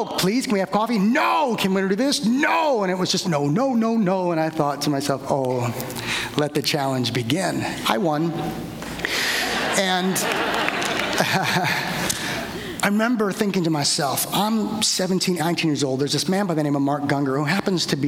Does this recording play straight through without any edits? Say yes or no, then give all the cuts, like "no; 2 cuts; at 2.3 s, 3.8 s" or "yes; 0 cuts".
no; 2 cuts; at 3.2 s, 15.4 s